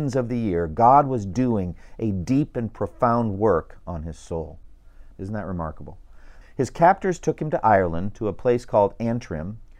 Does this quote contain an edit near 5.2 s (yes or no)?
yes